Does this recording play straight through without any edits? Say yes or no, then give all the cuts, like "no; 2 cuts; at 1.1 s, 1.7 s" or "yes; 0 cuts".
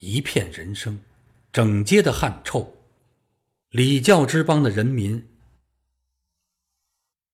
no; 1 cut; at 5.4 s